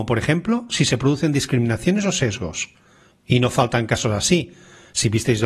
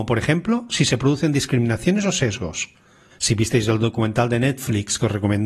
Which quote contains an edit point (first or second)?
second